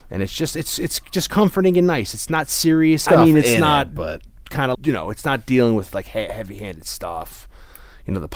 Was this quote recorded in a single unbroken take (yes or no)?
no